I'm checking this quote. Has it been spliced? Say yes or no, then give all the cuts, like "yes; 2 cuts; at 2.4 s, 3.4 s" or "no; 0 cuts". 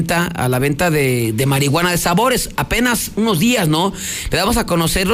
no; 0 cuts